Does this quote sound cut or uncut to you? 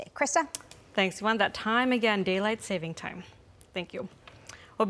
uncut